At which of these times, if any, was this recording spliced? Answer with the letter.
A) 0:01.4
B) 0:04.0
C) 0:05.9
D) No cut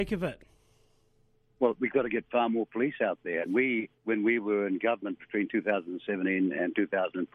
B